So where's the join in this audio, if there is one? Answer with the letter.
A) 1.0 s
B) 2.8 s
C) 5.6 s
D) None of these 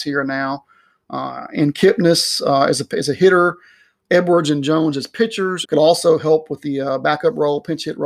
C